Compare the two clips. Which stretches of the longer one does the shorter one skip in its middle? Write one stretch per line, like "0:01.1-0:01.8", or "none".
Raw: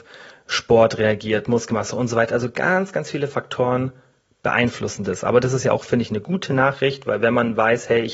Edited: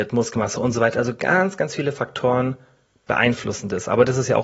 none